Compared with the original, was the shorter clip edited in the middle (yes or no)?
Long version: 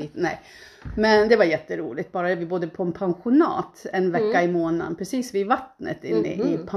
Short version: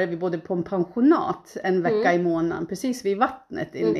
no